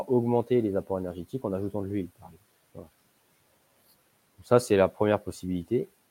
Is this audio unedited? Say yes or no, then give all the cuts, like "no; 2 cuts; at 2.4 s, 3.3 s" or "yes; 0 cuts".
yes; 0 cuts